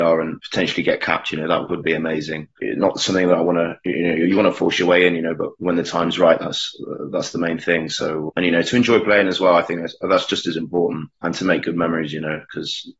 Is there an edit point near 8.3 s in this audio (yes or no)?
yes